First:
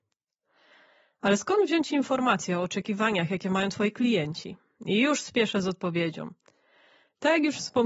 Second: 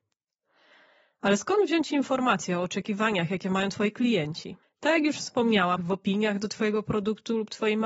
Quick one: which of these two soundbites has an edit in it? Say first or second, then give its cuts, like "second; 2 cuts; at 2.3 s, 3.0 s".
second; 2 cuts; at 4.6 s, 5.8 s